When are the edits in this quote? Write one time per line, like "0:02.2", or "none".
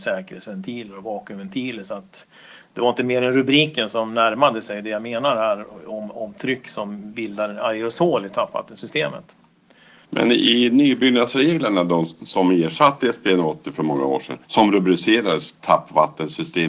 0:10.0
0:14.4